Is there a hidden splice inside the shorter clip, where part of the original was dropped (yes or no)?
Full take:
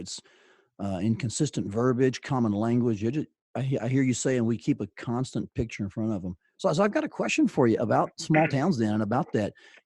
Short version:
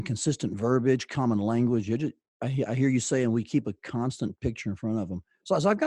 no